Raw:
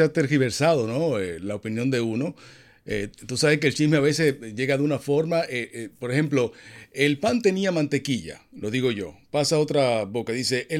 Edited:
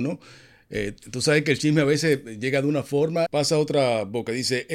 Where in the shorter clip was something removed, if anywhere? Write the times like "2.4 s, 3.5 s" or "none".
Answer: 3.3 s